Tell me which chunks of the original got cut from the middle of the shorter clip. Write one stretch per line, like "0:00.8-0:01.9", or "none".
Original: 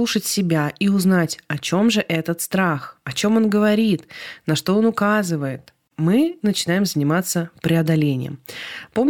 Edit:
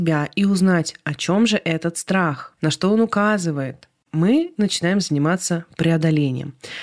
0:03.0-0:04.4